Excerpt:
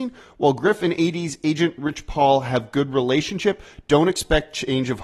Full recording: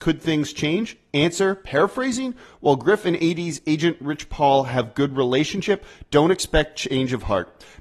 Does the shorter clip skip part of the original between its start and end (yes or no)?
no